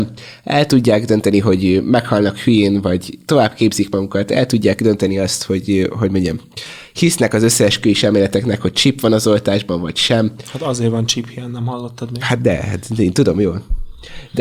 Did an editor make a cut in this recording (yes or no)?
no